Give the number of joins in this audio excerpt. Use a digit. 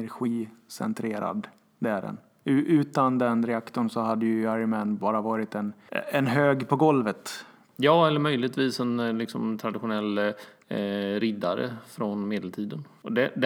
0